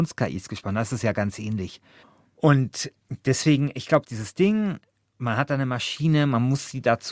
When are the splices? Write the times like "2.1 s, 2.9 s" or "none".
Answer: none